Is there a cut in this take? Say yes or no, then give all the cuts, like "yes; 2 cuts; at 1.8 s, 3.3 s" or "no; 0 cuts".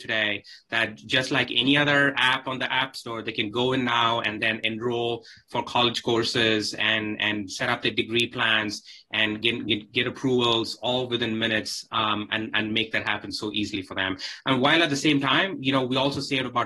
no; 0 cuts